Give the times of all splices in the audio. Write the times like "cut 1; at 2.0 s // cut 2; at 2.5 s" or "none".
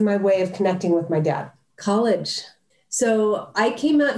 cut 1; at 1.7 s

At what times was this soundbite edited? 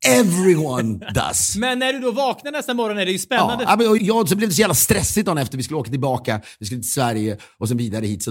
cut 1; at 4.0 s

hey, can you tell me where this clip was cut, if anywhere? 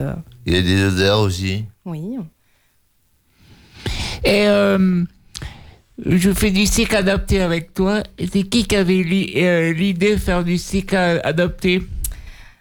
none

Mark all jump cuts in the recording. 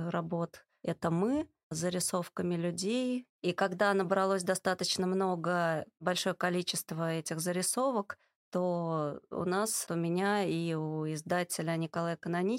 cut 1; at 3.3 s // cut 2; at 9.9 s

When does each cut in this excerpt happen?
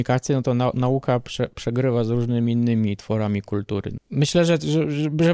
cut 1; at 4.0 s

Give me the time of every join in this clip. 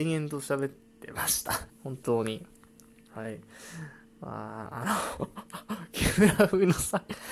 cut 1; at 1.7 s

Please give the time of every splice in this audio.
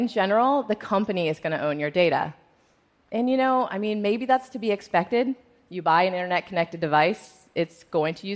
none

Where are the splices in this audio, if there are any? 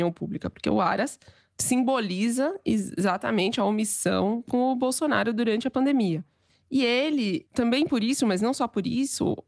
none

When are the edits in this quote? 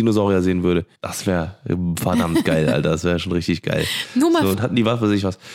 cut 1; at 1.0 s // cut 2; at 4.5 s

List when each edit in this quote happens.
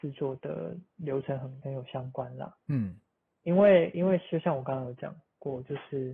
cut 1; at 1.6 s

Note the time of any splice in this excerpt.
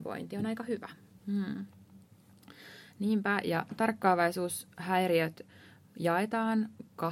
cut 1; at 1.1 s

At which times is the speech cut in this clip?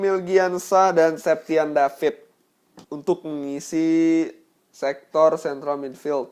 cut 1; at 2.8 s

